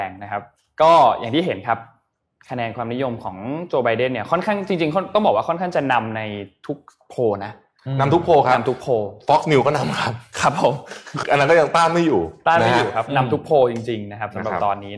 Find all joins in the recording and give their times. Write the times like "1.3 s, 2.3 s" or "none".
11.2 s